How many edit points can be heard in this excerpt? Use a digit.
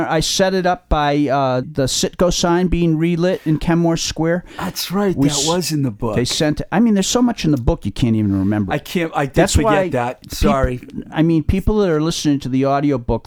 1